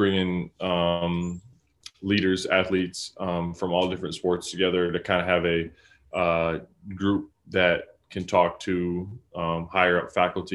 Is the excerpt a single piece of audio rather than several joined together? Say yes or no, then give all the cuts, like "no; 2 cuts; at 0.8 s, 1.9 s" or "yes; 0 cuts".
yes; 0 cuts